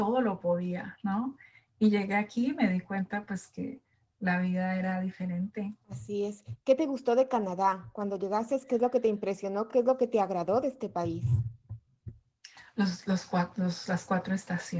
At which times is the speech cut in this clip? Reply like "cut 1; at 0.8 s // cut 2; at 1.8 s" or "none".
none